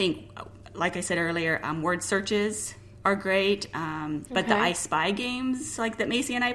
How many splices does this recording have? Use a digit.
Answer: 1